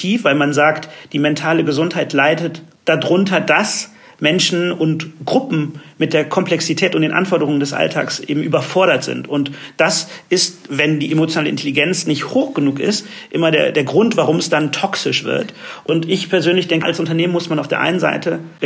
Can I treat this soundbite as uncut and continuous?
no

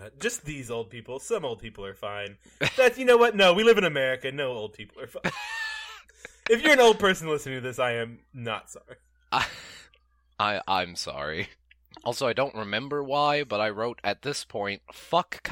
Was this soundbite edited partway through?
no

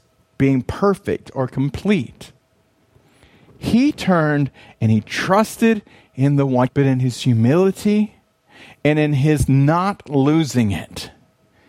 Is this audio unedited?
no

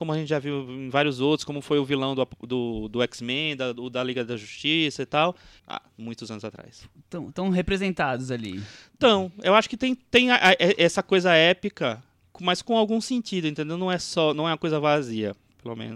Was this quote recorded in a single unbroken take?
no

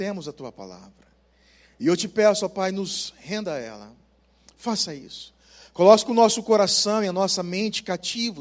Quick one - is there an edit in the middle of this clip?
no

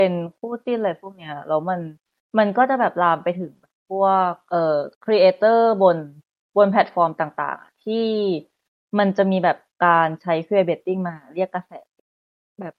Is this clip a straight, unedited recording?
no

